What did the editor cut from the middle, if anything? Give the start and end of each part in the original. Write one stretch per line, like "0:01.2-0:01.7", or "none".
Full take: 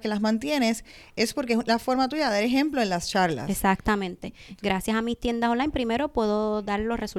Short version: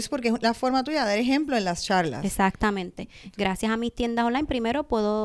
none